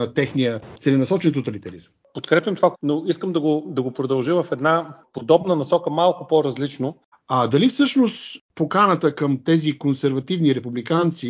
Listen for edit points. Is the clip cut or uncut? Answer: cut